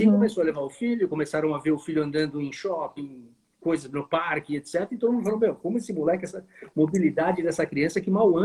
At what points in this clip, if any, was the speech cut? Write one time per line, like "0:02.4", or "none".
0:03.0